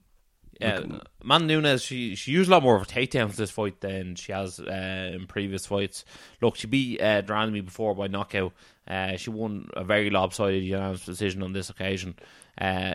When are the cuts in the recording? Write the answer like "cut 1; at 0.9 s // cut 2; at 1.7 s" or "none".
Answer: none